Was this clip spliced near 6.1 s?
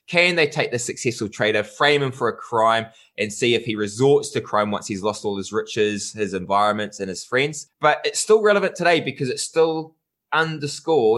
no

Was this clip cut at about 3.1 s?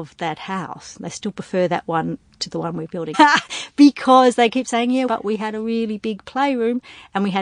yes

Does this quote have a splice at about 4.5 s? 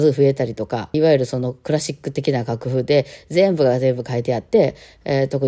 no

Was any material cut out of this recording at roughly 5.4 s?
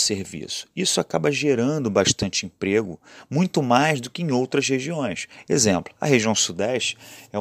no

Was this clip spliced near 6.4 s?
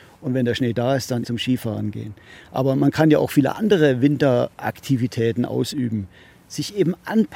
no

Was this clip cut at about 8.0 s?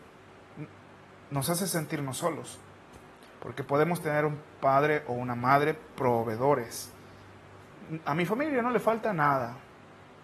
no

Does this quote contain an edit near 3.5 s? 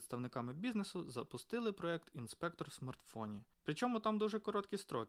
yes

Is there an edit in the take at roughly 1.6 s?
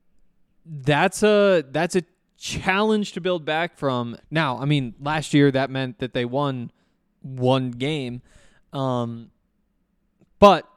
no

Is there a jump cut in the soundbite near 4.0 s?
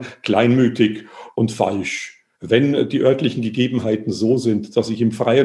no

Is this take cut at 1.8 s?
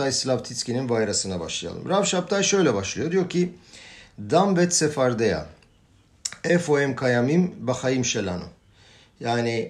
no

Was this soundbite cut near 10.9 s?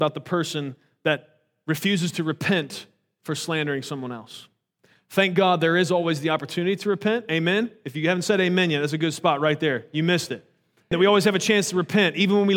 yes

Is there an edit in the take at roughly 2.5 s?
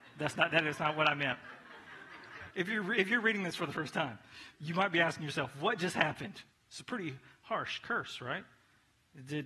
yes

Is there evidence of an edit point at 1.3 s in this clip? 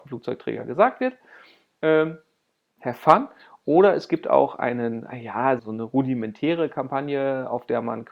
no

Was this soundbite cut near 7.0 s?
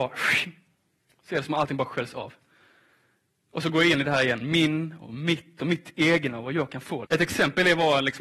yes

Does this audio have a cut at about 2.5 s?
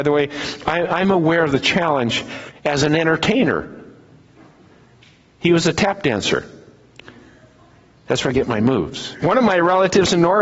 yes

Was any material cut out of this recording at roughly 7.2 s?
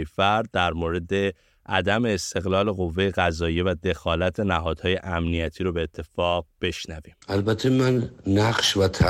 yes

